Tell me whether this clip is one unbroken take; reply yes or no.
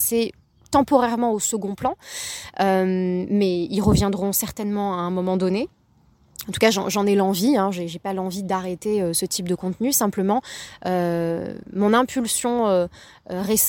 yes